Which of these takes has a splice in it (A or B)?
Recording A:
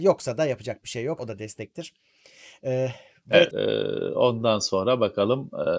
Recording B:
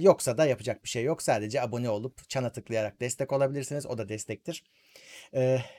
A